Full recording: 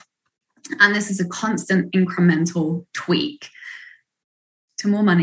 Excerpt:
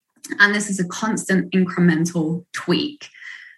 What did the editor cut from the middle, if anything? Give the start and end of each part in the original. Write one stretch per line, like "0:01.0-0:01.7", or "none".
none